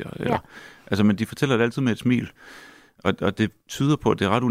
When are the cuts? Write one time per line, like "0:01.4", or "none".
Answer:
none